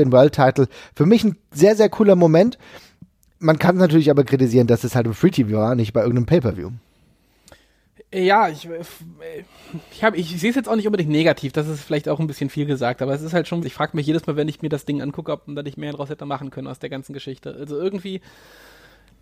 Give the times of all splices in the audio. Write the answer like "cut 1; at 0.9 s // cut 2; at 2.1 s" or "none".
cut 1; at 13.6 s